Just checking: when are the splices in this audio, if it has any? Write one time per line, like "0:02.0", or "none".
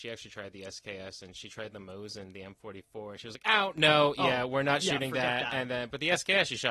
none